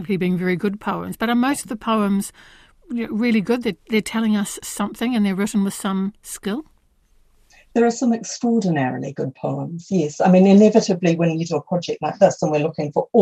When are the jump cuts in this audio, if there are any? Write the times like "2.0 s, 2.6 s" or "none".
none